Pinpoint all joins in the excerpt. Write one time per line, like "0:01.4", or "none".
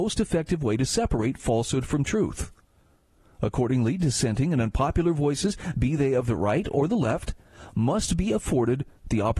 none

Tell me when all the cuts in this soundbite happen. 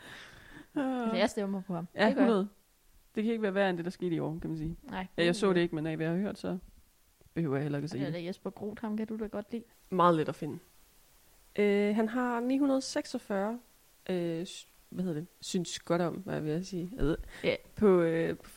0:09.7

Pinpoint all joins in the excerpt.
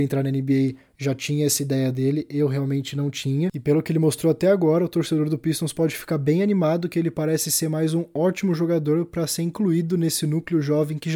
none

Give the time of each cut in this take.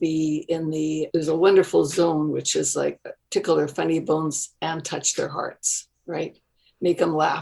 0:03.2

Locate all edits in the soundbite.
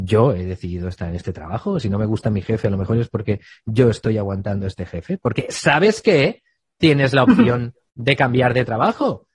none

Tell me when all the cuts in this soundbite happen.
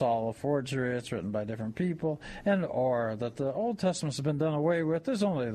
none

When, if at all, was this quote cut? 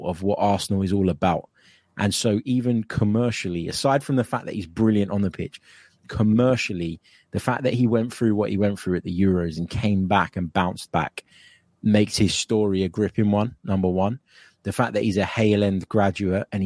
none

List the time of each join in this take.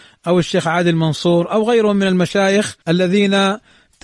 0:02.8

